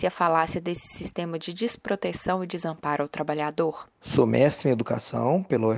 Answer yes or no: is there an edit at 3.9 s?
yes